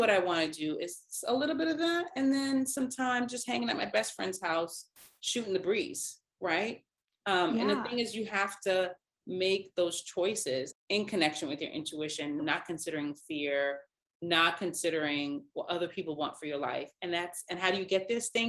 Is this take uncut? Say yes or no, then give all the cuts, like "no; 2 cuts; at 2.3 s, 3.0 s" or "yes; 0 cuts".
no; 2 cuts; at 10.7 s, 12.4 s